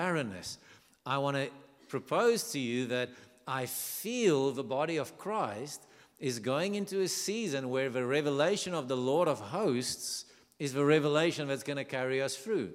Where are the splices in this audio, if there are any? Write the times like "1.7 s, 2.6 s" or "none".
none